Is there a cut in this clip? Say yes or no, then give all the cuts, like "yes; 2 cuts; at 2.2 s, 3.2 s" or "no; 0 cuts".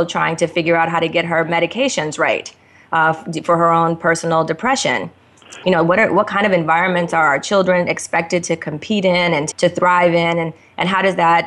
yes; 2 cuts; at 5.6 s, 9.5 s